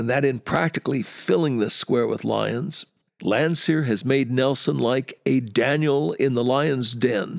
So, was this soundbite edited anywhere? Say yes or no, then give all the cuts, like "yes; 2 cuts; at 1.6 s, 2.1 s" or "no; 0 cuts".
yes; 1 cut; at 3.1 s